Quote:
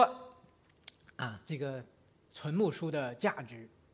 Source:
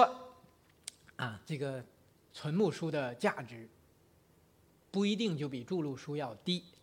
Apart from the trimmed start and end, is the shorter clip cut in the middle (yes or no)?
no